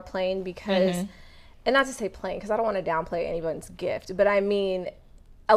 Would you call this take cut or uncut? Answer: uncut